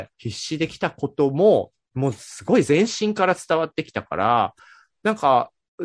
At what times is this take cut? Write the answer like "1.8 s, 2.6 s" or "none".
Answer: none